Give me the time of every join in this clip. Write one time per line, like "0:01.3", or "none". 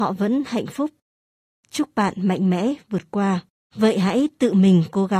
0:03.7